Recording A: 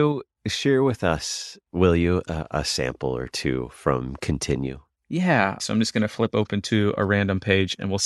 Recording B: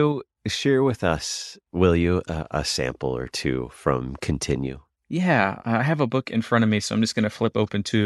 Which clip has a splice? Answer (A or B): A